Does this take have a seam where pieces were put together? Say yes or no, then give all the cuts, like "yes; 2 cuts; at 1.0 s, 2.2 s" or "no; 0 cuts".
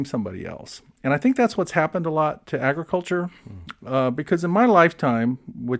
no; 0 cuts